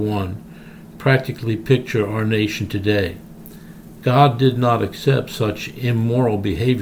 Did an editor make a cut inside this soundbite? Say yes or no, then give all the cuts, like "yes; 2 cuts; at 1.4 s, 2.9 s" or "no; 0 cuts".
no; 0 cuts